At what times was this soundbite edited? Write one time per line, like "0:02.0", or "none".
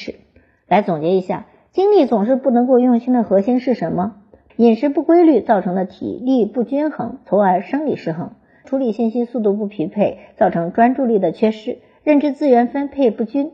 0:04.5
0:08.6